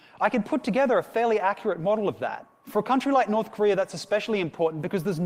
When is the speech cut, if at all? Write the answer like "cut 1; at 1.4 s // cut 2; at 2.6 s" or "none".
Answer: cut 1; at 2.6 s